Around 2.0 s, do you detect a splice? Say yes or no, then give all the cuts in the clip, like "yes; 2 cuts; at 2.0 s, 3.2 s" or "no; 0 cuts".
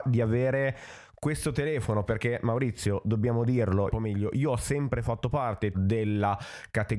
no; 2 cuts; at 3.9 s, 5.7 s